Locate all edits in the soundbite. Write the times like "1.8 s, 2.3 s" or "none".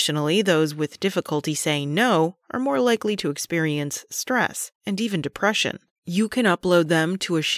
4.8 s, 6.0 s